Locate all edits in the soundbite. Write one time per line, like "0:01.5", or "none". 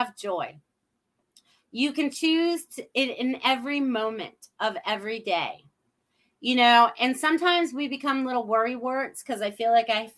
none

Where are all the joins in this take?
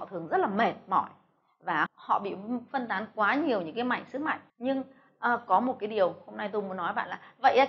0:01.9
0:04.5

